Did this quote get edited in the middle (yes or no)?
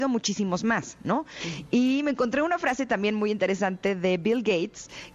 yes